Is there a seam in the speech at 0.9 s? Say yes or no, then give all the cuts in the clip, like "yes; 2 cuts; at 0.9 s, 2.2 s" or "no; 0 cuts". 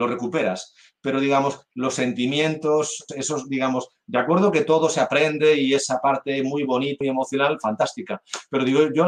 no; 2 cuts; at 3.1 s, 7.0 s